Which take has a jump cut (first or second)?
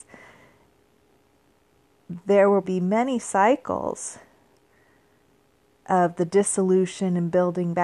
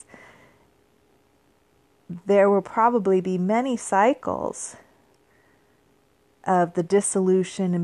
first